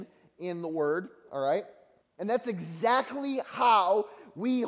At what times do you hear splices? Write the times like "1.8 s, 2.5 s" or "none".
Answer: 2.0 s